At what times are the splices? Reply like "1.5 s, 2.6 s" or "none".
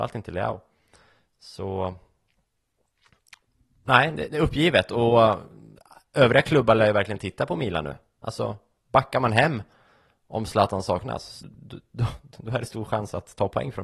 11.4 s